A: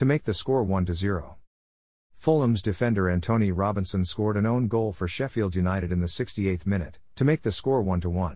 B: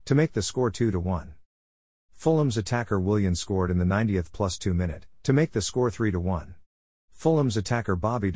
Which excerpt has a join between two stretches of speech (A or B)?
B